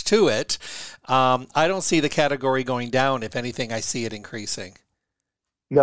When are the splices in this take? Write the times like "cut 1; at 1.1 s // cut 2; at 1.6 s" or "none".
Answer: none

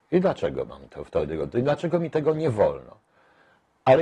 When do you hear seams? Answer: none

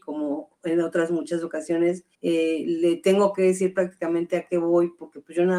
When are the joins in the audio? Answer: cut 1; at 2.1 s

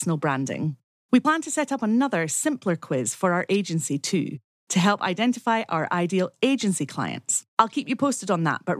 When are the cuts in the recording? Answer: cut 1; at 0.9 s

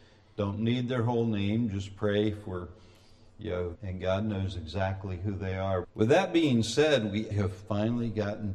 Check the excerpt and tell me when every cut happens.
cut 1; at 3.7 s // cut 2; at 5.8 s // cut 3; at 7.3 s

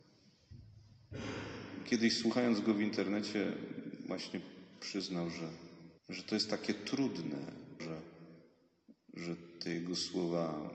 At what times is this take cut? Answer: cut 1; at 6.0 s // cut 2; at 7.8 s

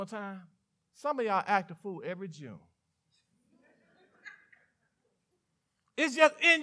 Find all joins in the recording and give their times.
cut 1; at 0.9 s

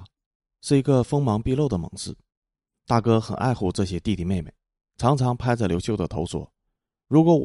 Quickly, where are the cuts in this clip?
none

